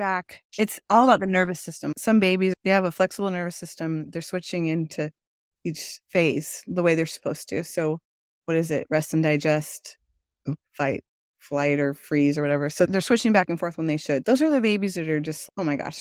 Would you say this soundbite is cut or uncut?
cut